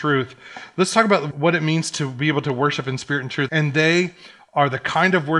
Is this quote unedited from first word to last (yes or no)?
no